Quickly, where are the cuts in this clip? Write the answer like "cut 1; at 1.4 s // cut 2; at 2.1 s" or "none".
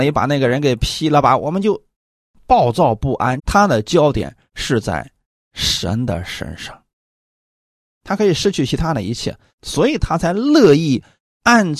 cut 1; at 3.4 s // cut 2; at 9.5 s